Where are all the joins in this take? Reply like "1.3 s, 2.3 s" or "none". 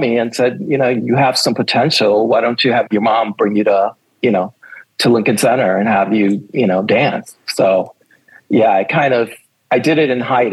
none